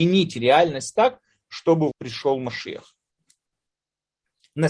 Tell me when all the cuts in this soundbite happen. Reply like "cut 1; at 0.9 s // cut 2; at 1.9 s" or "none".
cut 1; at 1.9 s